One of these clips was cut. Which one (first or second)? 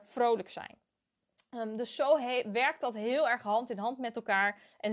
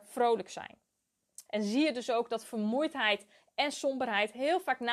second